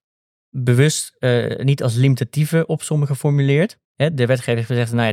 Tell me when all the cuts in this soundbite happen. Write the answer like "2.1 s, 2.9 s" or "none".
3.8 s